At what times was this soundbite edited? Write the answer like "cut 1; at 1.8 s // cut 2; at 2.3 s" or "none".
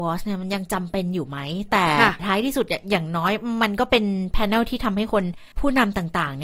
cut 1; at 5.5 s